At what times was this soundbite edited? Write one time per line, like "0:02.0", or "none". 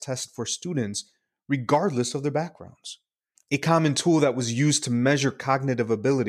0:03.4